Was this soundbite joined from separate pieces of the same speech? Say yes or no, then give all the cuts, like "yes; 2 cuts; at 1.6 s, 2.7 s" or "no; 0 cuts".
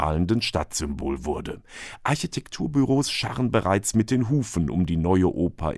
no; 0 cuts